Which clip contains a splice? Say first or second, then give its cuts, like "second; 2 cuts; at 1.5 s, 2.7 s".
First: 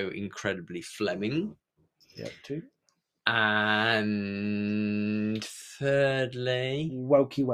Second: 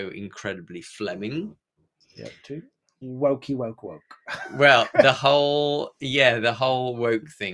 second; 1 cut; at 3.0 s